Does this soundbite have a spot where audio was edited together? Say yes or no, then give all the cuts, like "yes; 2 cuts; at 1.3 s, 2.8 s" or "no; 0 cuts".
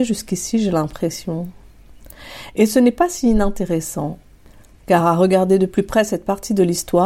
no; 0 cuts